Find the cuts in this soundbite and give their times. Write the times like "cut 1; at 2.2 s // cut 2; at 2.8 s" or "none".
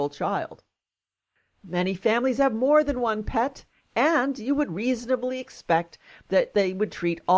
none